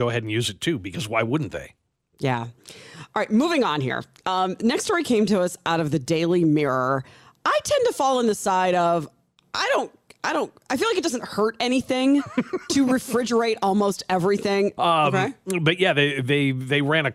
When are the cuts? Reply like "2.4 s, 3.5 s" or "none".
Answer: 14.8 s